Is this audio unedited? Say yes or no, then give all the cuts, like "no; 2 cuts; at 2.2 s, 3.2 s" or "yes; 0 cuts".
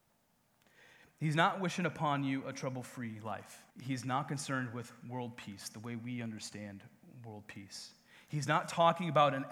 no; 1 cut; at 3.7 s